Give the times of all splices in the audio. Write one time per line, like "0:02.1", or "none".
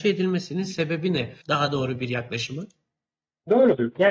0:01.4